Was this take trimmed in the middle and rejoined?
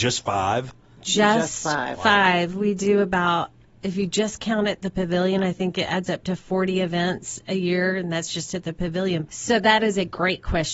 yes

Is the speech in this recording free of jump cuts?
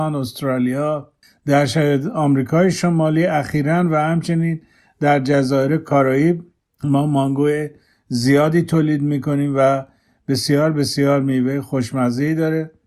yes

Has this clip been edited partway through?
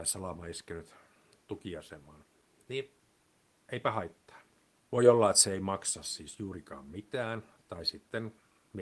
yes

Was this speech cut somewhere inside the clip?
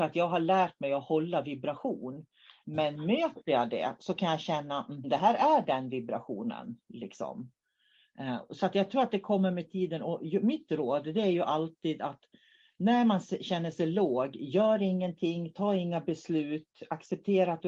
yes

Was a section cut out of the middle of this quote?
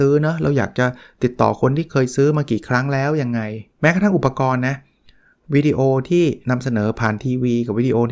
yes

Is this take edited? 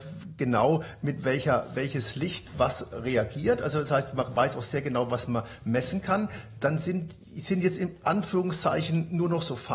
no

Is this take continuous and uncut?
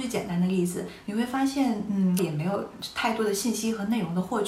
no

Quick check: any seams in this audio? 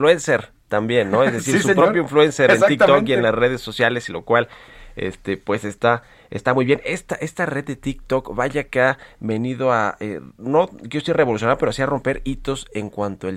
no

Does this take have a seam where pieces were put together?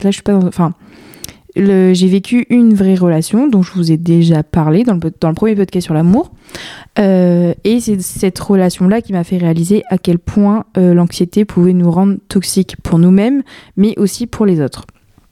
no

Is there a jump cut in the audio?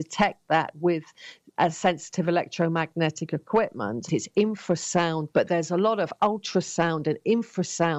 yes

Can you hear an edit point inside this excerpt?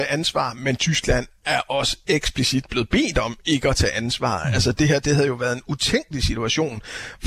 no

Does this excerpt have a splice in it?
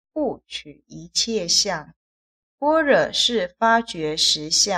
yes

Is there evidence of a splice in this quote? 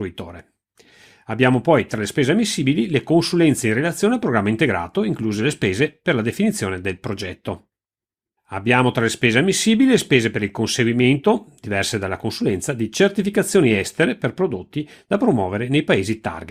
no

